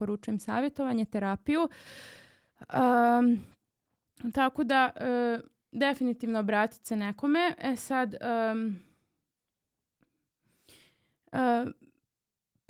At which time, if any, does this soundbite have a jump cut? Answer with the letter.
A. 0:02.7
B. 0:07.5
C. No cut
C